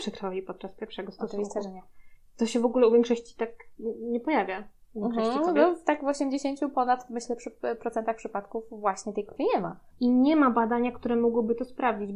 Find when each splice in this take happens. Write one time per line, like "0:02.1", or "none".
0:09.9

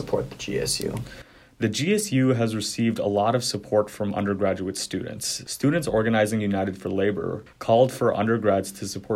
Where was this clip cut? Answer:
0:07.5

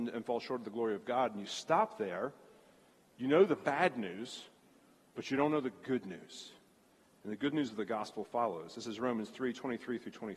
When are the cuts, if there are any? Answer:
none

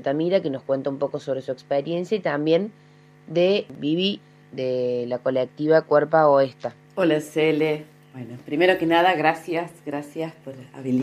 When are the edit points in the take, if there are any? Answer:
0:06.8

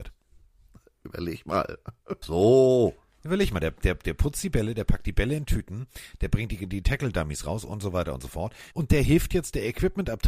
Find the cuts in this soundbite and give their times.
0:02.2
0:08.7

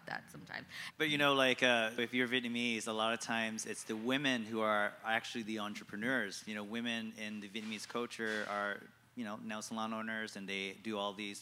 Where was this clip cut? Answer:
0:00.9
0:02.0

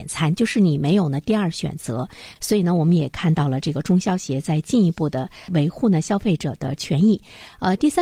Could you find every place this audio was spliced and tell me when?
0:02.4

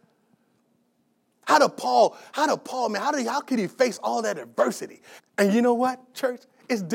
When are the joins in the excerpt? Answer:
0:01.4
0:05.2

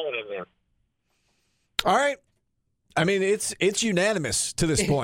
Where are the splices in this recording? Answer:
none

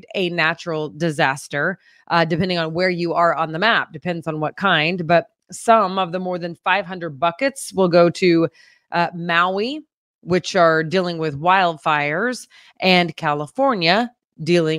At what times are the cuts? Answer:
none

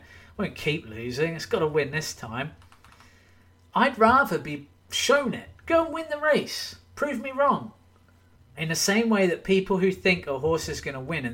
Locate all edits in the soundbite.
0:05.6
0:08.4

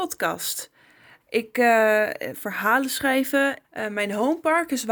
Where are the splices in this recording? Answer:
0:01.2
0:02.3
0:03.6

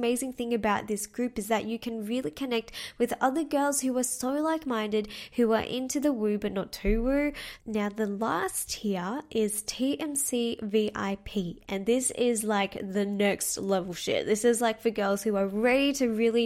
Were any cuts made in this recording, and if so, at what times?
0:07.6

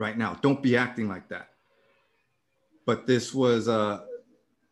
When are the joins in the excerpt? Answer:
0:02.7

